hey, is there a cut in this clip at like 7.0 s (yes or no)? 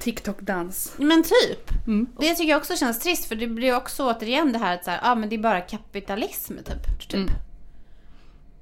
yes